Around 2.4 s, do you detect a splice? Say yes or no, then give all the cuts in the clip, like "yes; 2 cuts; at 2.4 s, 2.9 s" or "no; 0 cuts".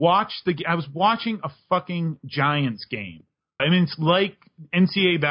no; 1 cut; at 3.6 s